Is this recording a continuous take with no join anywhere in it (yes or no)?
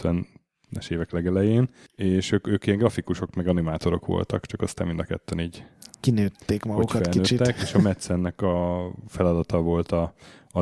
yes